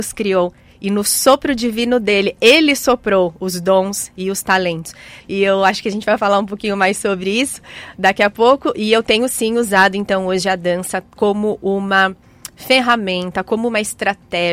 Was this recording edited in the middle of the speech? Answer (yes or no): yes